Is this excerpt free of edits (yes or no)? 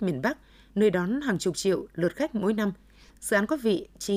yes